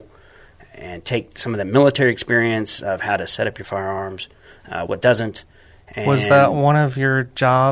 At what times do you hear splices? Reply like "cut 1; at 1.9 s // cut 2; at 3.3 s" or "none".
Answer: cut 1; at 4.9 s